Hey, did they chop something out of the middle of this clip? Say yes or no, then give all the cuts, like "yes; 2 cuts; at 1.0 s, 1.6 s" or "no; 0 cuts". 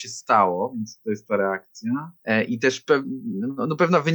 yes; 1 cut; at 2.2 s